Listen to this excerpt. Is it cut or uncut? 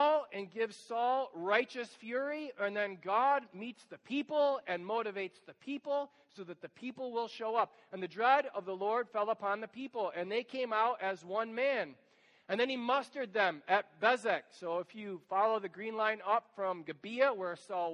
uncut